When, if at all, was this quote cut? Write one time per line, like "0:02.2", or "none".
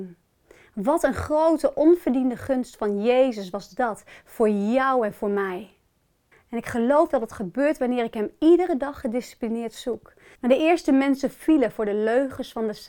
0:06.3
0:10.3